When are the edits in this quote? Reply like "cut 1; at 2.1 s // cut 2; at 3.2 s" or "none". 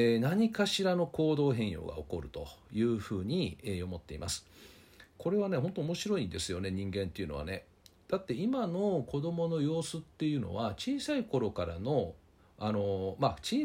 none

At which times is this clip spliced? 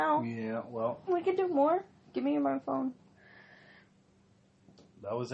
cut 1; at 1.1 s

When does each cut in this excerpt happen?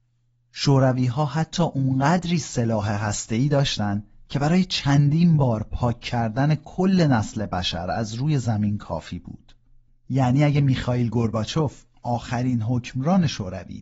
cut 1; at 9.9 s

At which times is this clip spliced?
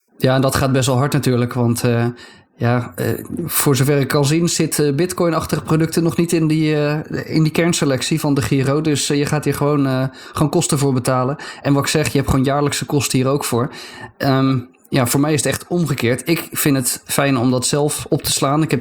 none

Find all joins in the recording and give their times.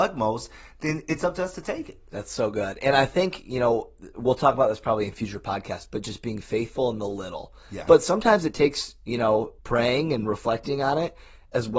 cut 1; at 7.9 s // cut 2; at 9.6 s

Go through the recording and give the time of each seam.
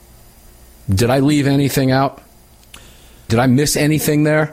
cut 1; at 3.3 s

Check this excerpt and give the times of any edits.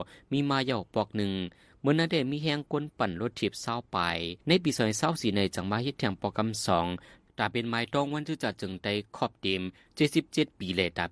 cut 1; at 4.4 s

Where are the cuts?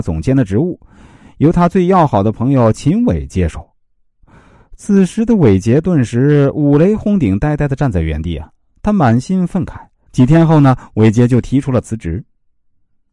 cut 1; at 10.1 s

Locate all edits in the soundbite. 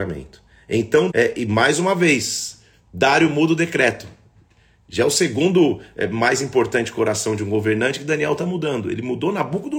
cut 1; at 1.1 s

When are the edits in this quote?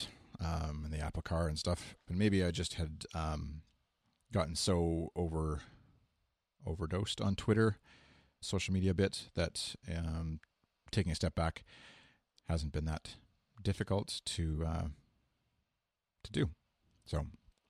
cut 1; at 2.1 s // cut 2; at 8.4 s

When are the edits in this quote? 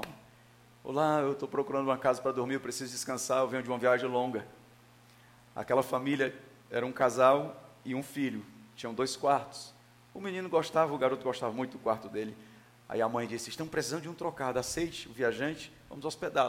none

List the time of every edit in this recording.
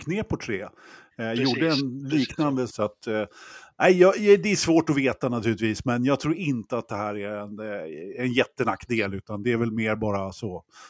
cut 1; at 2.7 s

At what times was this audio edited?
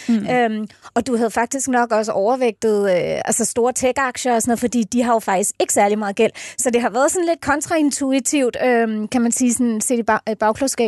none

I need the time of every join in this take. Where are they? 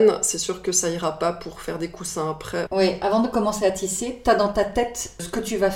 cut 1; at 2.7 s

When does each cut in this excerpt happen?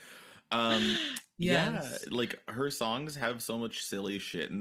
none

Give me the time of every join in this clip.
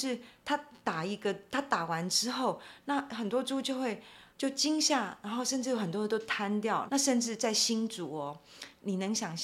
cut 1; at 4.3 s // cut 2; at 6.9 s

